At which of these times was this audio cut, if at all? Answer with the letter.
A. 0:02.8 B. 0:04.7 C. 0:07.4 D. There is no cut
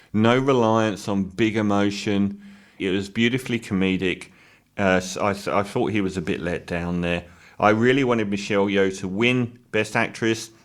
A